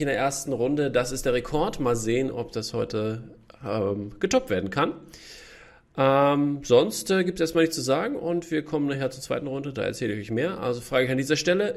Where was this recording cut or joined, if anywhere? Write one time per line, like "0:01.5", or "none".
none